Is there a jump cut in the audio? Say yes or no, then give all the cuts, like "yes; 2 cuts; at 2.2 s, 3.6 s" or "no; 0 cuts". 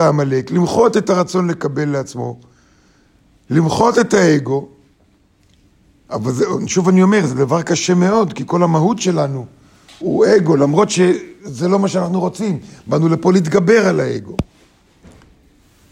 yes; 1 cut; at 10.0 s